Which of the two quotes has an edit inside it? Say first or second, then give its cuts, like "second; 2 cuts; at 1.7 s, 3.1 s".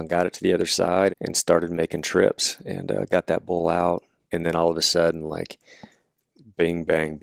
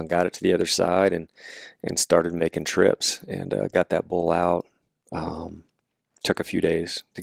first; 2 cuts; at 1.1 s, 4.2 s